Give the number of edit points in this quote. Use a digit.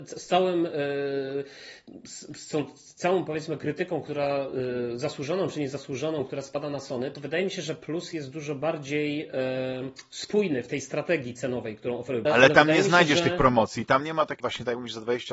2